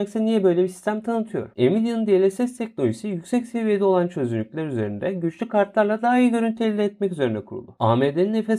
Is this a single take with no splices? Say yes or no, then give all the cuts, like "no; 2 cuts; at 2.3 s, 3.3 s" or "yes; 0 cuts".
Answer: no; 1 cut; at 1.5 s